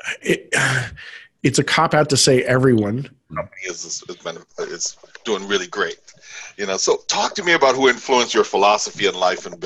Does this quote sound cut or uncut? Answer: cut